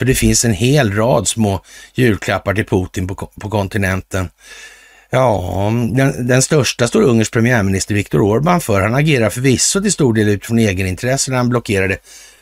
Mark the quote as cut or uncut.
uncut